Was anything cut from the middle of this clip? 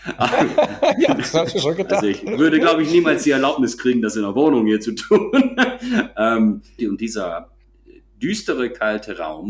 yes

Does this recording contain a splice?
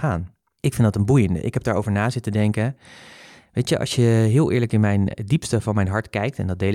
no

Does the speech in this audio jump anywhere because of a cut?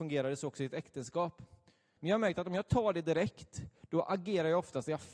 yes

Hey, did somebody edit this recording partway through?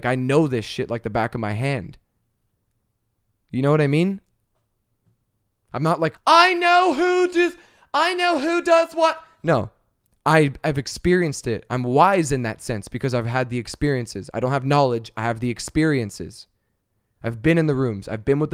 yes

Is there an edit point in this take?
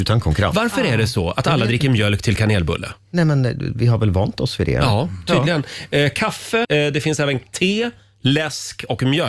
yes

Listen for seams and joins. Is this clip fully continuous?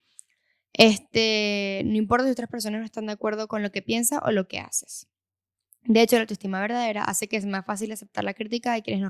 yes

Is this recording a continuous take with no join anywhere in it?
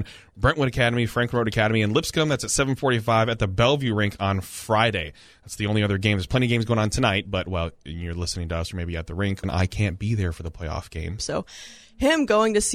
no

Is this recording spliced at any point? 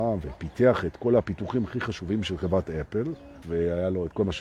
yes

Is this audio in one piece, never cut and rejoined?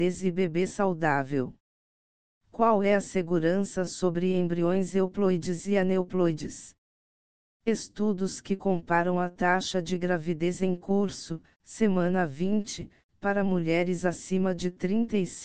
yes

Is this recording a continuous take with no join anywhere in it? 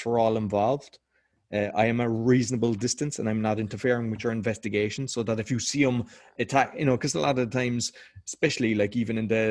yes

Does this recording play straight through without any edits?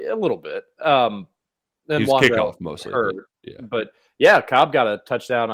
yes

